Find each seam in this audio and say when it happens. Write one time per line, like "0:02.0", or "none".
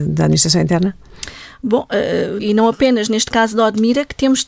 0:02.4